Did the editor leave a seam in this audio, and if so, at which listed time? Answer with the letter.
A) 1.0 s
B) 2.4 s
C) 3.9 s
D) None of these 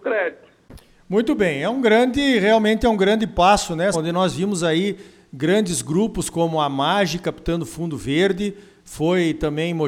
C